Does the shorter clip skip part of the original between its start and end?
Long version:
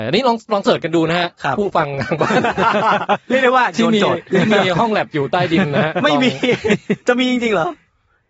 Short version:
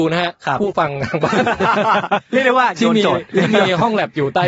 no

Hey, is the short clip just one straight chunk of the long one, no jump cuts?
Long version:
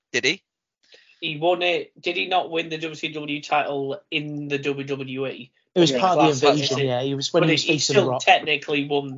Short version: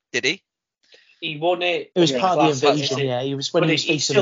no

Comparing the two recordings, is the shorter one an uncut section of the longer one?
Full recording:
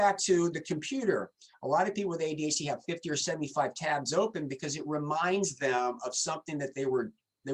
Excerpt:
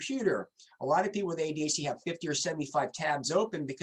yes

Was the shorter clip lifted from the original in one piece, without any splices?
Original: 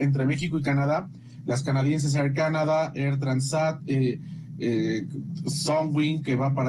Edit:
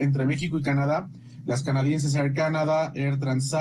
yes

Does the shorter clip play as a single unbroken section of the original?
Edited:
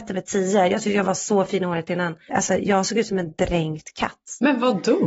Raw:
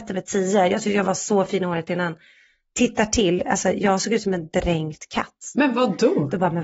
no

